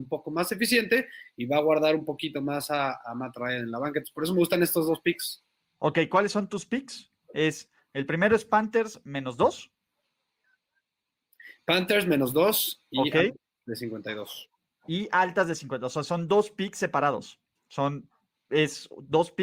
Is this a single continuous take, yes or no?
yes